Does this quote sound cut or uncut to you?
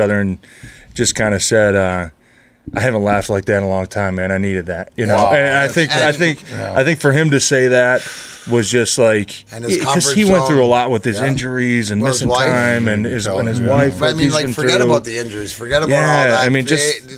uncut